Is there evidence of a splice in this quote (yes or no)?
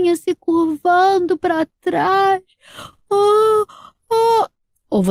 no